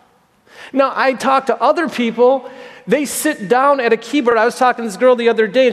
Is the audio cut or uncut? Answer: uncut